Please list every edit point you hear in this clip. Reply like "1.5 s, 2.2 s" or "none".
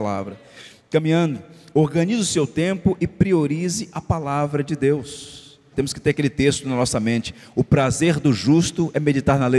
5.7 s